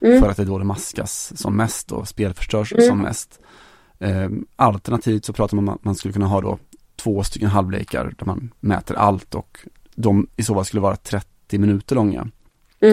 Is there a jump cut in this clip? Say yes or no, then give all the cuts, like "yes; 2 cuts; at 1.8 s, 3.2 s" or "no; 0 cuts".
no; 0 cuts